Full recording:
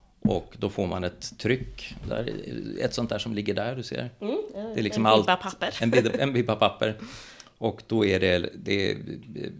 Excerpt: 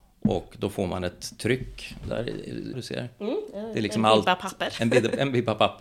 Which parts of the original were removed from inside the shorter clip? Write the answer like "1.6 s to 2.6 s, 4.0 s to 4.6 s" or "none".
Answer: 2.7 s to 3.7 s